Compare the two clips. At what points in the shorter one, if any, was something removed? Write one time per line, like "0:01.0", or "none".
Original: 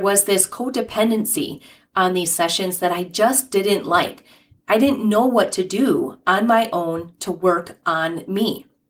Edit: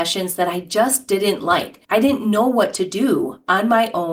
0:01.8